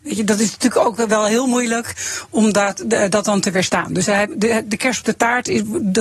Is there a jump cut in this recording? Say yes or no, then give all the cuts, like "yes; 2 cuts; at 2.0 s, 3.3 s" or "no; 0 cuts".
no; 0 cuts